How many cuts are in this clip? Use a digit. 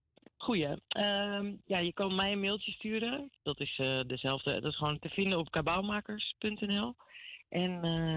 1